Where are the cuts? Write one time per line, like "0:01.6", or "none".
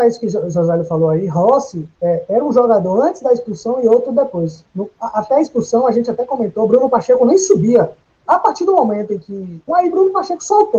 0:08.3
0:09.7